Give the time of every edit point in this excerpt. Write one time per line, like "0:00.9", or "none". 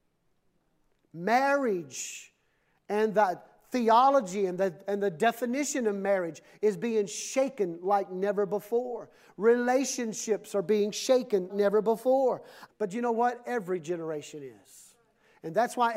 0:11.5
0:12.7